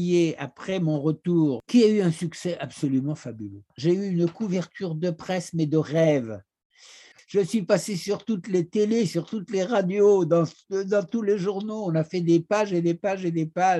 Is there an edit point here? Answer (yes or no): yes